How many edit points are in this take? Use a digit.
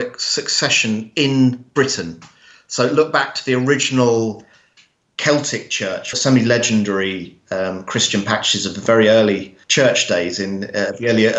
2